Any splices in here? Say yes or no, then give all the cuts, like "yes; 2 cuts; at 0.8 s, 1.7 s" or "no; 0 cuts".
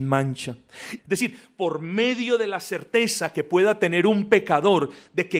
yes; 1 cut; at 1.0 s